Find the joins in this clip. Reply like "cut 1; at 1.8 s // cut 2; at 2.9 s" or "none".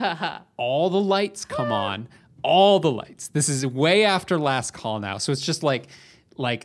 none